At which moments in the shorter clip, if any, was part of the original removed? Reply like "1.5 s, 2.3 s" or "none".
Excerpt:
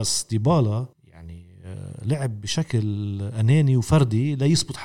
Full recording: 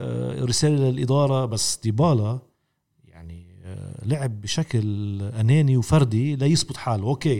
0.9 s